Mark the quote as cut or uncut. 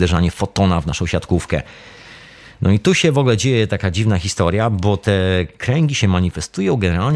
uncut